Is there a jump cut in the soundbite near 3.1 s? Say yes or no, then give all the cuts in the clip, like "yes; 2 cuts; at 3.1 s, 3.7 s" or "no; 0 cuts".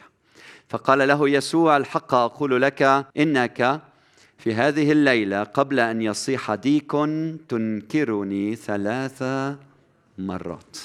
yes; 1 cut; at 3.1 s